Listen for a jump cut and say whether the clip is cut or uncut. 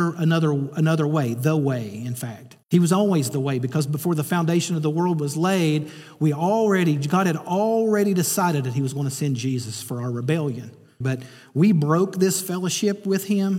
cut